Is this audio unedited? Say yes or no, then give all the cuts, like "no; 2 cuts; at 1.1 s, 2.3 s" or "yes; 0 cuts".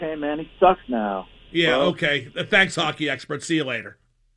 yes; 0 cuts